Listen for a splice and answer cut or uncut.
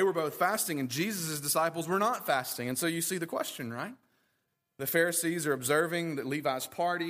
uncut